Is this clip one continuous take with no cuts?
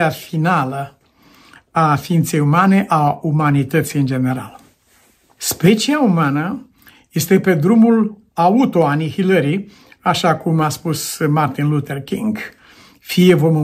no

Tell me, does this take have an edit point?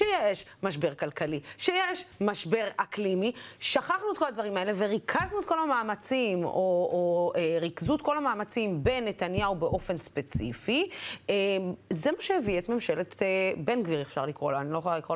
no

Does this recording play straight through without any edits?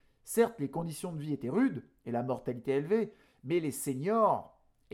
yes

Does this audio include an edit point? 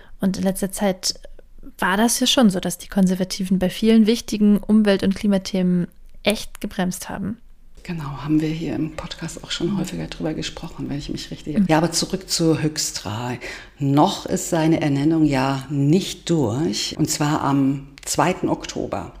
yes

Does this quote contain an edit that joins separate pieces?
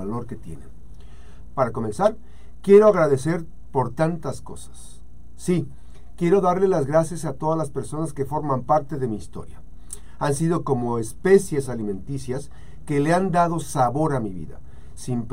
yes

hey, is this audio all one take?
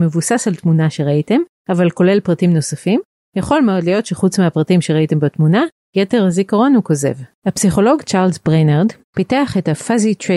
no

